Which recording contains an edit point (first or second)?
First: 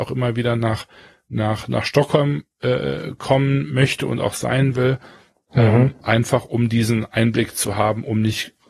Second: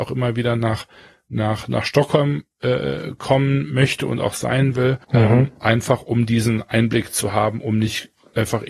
second